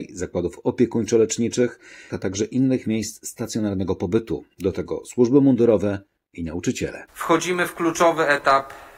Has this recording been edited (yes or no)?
yes